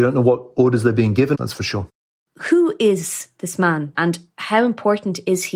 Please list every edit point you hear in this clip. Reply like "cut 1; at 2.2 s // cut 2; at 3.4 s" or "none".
cut 1; at 1.3 s // cut 2; at 3.9 s